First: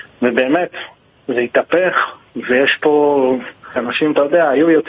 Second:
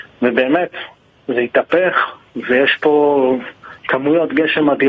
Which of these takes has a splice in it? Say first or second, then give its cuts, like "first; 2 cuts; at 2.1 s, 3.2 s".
first; 1 cut; at 3.8 s